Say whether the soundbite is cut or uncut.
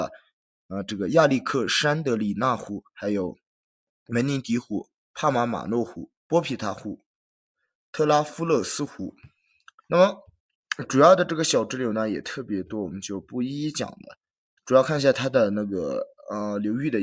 cut